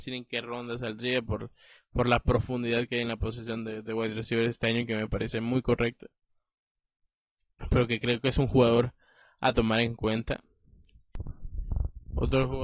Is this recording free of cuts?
yes; 0 cuts

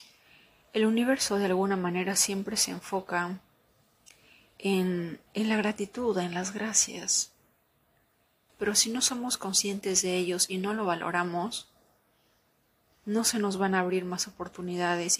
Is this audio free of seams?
no; 2 cuts; at 5.3 s, 8.5 s

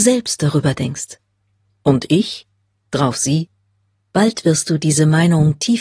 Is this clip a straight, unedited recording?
no; 1 cut; at 2.8 s

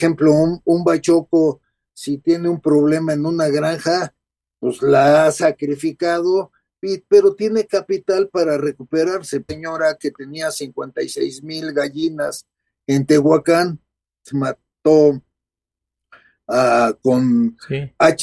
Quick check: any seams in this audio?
yes; 2 cuts; at 9.5 s, 14.3 s

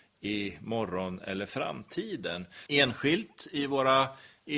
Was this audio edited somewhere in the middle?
yes; 1 cut; at 2.7 s

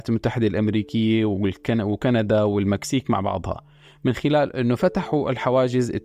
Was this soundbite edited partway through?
no; 0 cuts

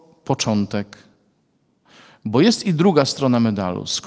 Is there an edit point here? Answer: no; 0 cuts

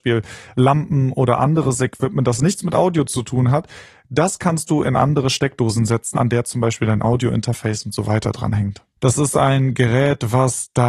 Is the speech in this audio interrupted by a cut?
yes; 2 cuts; at 6.1 s, 9.0 s

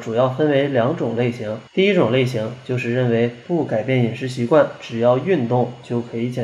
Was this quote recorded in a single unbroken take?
no; 1 cut; at 1.7 s

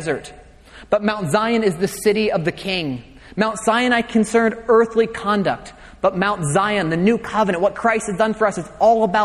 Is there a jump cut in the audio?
no; 0 cuts

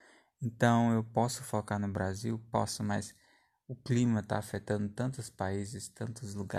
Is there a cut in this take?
no; 0 cuts

